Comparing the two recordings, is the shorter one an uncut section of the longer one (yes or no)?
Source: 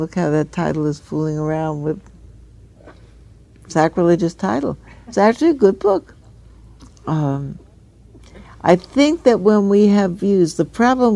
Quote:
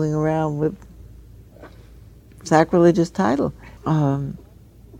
no